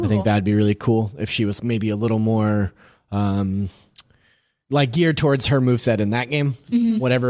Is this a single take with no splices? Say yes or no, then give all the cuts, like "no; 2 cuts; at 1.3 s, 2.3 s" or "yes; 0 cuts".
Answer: no; 1 cut; at 1.6 s